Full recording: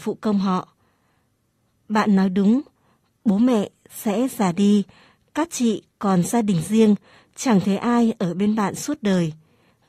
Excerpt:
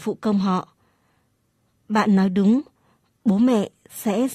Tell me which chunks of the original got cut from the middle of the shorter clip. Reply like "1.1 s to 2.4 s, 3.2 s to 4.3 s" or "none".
none